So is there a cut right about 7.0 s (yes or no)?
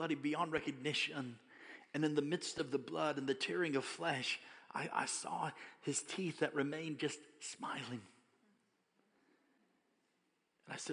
no